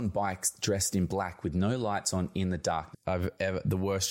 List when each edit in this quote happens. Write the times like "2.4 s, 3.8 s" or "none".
2.9 s